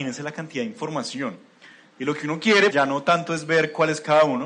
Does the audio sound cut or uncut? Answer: cut